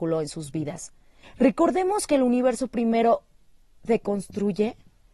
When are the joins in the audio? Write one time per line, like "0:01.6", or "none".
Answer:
0:01.2